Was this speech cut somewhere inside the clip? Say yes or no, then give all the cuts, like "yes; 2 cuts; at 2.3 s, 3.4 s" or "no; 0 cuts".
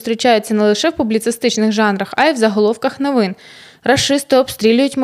no; 0 cuts